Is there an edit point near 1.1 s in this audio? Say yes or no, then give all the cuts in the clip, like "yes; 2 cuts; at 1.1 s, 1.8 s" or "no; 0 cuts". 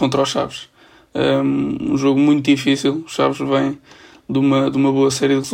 yes; 1 cut; at 1.1 s